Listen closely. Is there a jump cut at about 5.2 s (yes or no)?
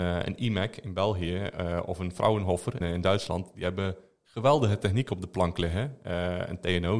no